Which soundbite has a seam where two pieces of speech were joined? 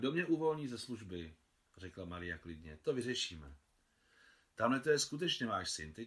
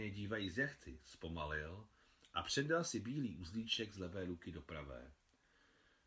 first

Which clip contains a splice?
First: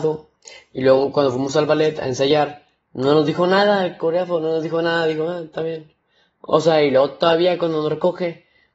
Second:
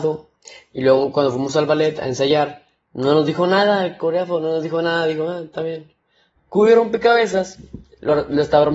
second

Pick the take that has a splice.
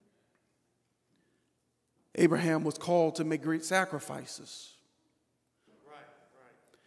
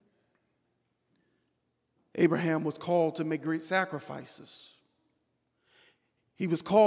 first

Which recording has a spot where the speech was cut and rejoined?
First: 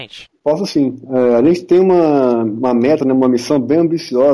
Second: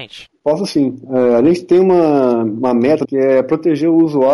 second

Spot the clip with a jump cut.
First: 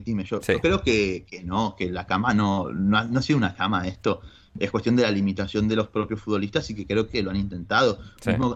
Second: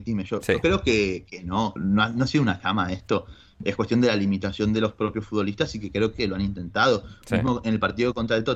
second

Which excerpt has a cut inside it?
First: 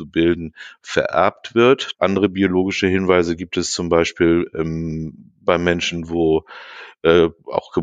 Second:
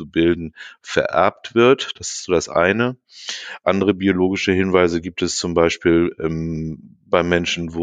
first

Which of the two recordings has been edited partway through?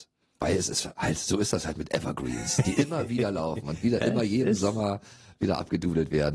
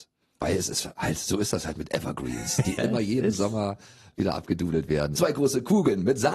second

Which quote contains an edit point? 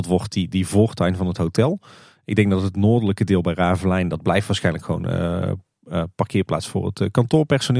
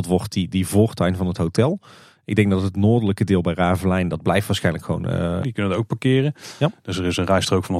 second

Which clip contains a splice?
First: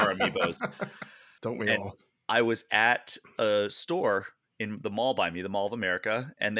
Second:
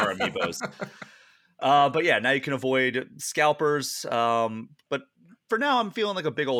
first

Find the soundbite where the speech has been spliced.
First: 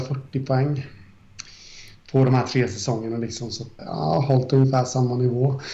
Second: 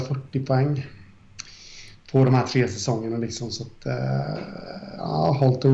first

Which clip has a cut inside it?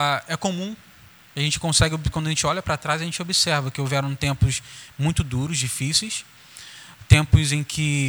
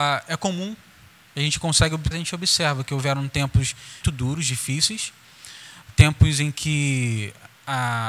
second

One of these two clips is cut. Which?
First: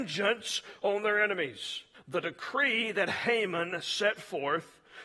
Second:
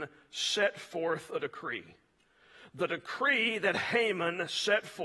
first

